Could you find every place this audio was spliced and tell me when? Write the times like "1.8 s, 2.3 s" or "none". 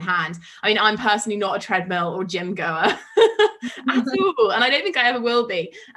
none